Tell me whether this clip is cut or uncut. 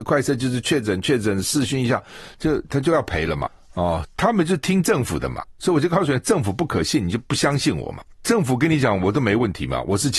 cut